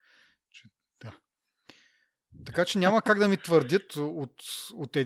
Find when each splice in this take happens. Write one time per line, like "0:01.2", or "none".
0:03.9